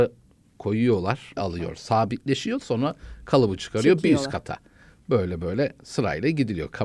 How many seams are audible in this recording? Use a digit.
1